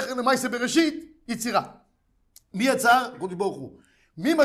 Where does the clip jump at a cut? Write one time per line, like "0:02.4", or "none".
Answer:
none